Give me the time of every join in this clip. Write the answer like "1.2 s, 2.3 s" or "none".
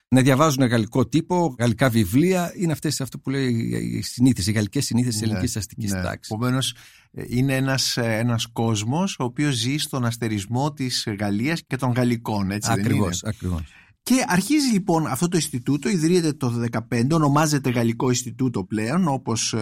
none

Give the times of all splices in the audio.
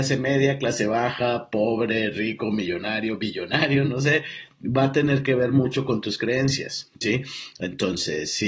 none

